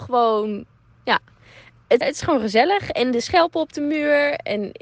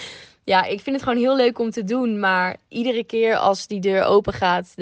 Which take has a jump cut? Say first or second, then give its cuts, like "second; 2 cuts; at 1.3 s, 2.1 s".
first; 1 cut; at 2.0 s